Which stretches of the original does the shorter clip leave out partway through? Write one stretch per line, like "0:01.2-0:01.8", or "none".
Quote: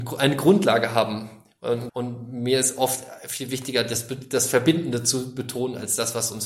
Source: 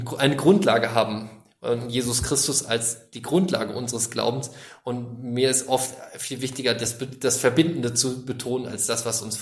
0:01.9-0:04.8